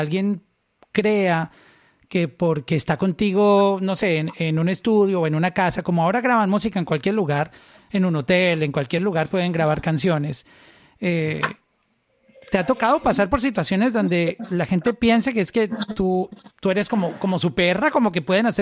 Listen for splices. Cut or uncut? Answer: uncut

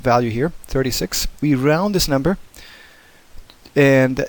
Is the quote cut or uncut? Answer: cut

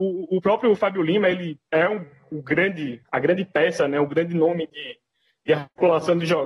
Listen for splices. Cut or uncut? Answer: uncut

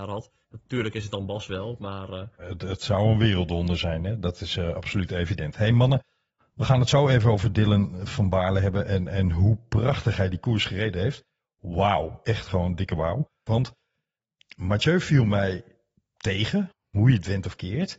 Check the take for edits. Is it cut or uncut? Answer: cut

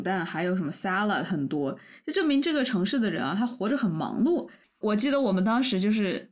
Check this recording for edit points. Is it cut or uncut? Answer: cut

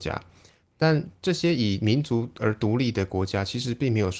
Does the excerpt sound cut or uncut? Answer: uncut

